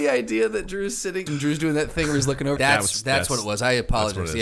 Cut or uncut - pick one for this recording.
cut